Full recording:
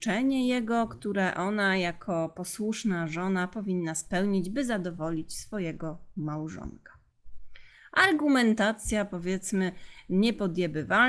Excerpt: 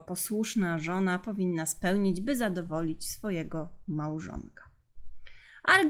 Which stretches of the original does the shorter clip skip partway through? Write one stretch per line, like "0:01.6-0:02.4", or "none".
none